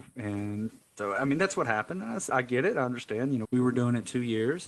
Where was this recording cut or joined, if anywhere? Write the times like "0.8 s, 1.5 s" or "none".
2.3 s, 3.4 s